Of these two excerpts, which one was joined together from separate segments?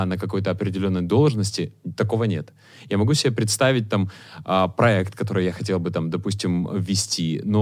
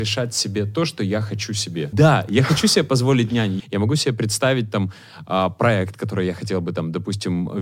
second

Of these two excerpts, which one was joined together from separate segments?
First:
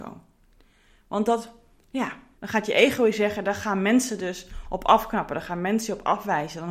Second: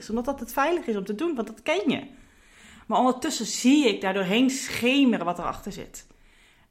first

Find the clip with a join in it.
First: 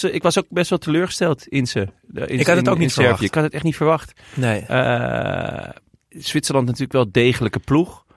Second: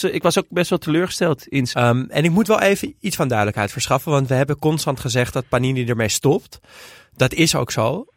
second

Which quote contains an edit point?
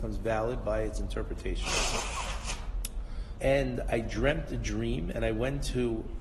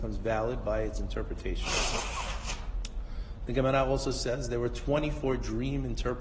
first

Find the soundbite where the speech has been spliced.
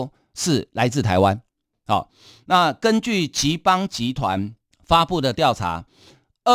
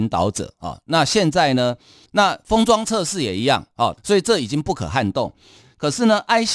second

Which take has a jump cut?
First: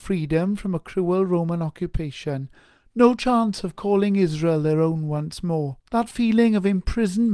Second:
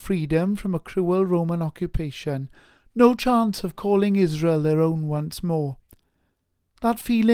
first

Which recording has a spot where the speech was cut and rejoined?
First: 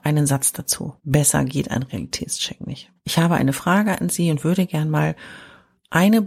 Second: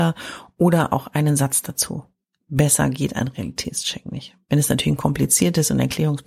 first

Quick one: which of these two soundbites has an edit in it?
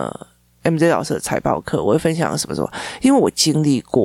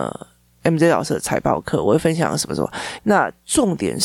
second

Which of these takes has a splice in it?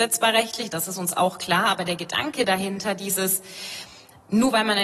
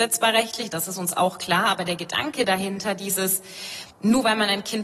second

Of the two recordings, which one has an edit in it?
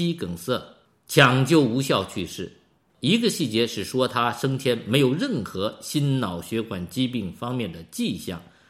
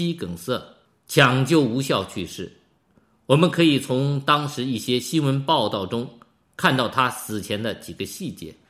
first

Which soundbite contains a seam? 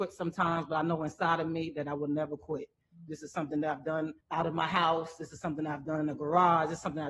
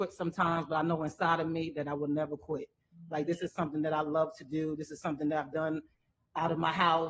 first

